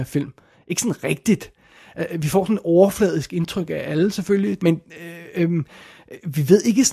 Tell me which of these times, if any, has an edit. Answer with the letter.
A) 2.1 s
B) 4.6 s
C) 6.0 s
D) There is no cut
B